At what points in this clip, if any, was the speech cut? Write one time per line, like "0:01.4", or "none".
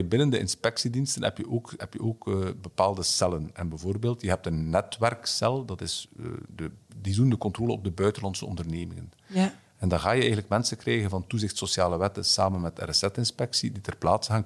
0:01.8

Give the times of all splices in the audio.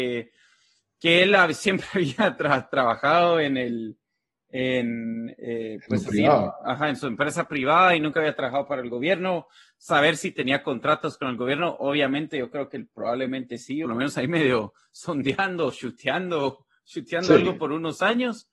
0:13.8

